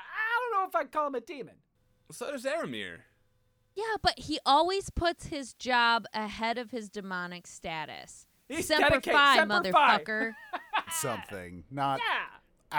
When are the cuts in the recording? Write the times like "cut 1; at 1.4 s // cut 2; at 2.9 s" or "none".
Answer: cut 1; at 8.4 s // cut 2; at 10.9 s